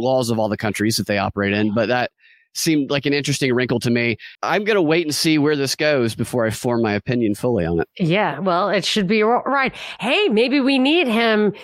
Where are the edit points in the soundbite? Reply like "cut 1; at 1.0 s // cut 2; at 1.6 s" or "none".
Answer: cut 1; at 4.4 s